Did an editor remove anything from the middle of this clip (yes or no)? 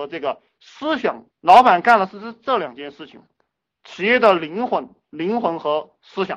yes